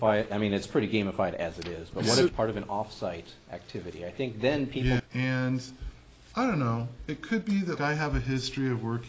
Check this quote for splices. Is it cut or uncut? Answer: cut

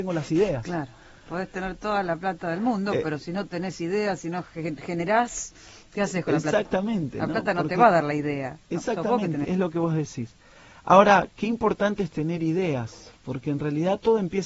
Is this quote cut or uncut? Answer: cut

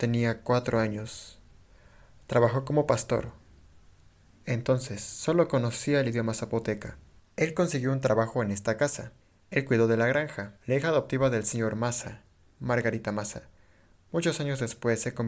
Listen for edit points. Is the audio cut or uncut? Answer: cut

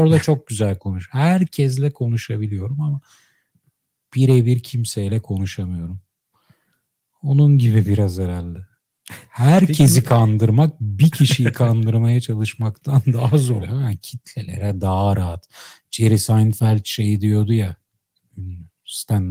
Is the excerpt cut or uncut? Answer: cut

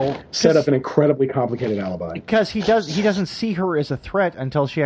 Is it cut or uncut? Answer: uncut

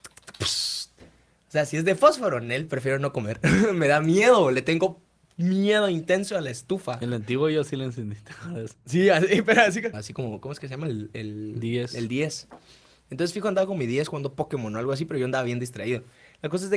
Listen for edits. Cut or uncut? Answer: cut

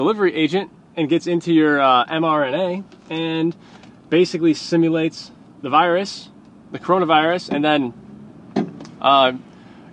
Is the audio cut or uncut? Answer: uncut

